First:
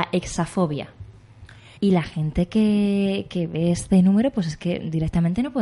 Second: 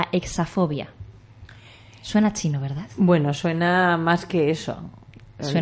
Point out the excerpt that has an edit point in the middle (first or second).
first